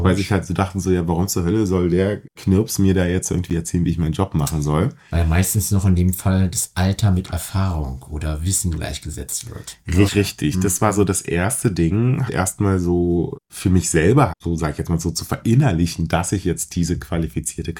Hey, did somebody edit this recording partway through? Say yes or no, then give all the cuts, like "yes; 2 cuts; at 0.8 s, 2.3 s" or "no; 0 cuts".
yes; 3 cuts; at 10.1 s, 12.3 s, 14.3 s